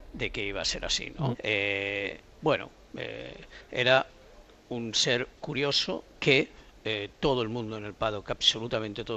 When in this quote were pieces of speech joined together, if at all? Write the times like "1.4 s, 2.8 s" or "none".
1.3 s